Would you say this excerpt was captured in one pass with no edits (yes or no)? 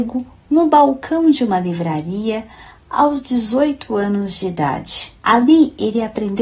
no